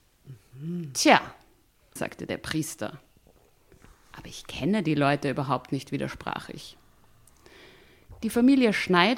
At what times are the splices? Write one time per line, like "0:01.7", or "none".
0:02.0